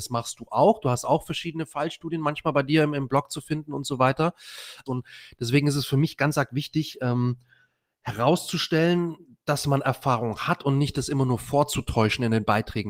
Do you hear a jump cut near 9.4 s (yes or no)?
no